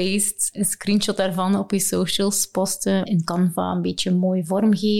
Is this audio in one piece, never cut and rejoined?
no; 1 cut; at 3.1 s

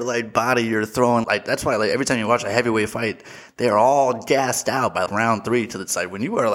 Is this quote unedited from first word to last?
no; 2 cuts; at 1.2 s, 5.1 s

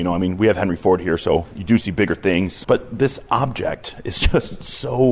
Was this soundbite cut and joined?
yes; 1 cut; at 2.6 s

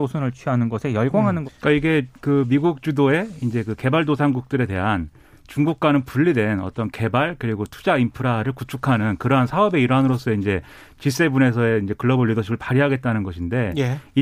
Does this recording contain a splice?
yes; 1 cut; at 1.4 s

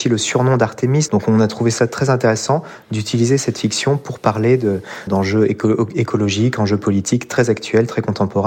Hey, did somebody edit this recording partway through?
yes; 2 cuts; at 1.1 s, 5.1 s

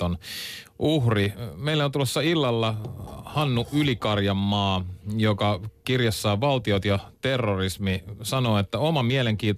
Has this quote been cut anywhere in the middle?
no; 0 cuts

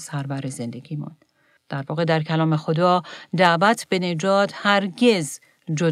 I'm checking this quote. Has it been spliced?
yes; 1 cut; at 1.6 s

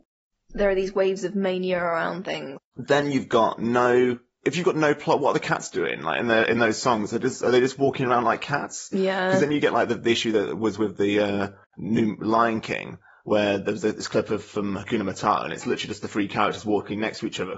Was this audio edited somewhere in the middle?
yes; 2 cuts; at 2.6 s, 4.4 s

